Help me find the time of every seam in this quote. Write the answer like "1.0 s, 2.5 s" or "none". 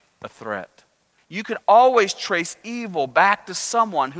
1.2 s